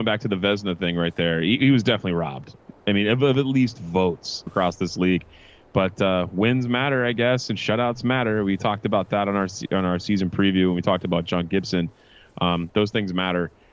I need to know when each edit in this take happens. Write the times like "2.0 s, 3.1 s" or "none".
4.5 s